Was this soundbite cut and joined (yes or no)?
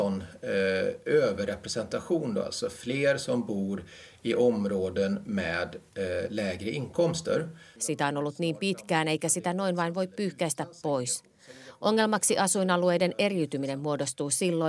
yes